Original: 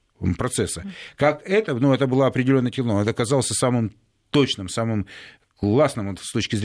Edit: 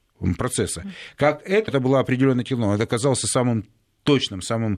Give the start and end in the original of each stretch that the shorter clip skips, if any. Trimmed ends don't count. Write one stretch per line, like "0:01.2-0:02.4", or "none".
0:01.7-0:02.0